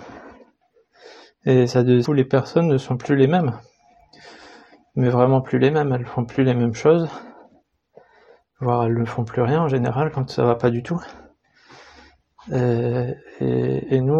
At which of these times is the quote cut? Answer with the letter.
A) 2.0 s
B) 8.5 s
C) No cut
A